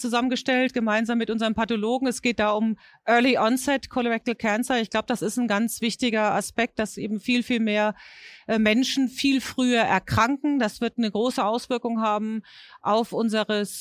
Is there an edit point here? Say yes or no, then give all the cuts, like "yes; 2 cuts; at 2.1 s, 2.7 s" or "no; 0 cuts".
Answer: no; 0 cuts